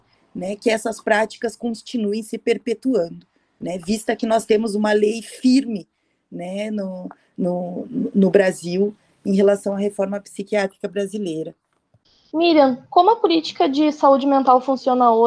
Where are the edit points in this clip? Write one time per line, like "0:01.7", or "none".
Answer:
none